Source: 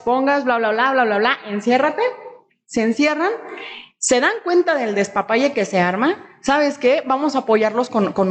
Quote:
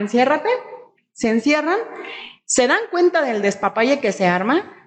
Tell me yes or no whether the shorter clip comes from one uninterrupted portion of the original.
yes